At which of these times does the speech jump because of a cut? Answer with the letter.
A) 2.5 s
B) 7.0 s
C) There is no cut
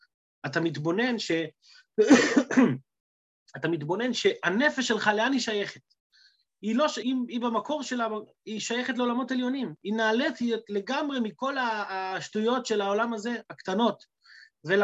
B